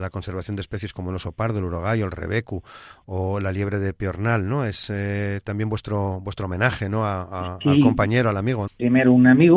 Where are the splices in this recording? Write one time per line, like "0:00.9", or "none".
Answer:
0:08.7

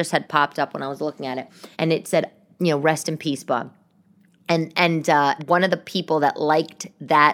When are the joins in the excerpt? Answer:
0:01.7
0:05.4

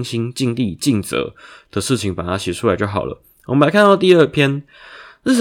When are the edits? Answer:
none

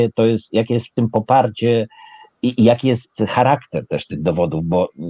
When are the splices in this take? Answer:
none

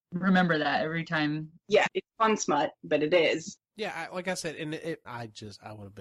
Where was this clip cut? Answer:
0:01.9
0:03.6
0:05.0

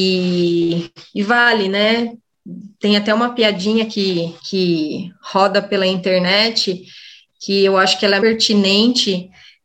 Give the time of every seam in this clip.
0:04.4
0:08.2

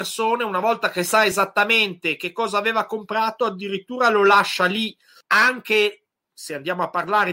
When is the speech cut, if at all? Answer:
0:05.2

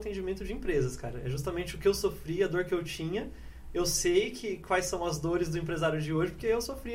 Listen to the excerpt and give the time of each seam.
none

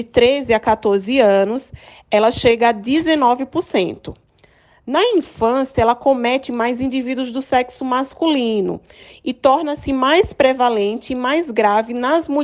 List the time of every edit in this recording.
none

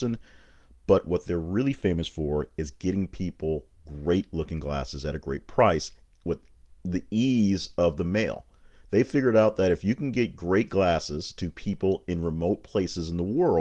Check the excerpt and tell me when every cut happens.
none

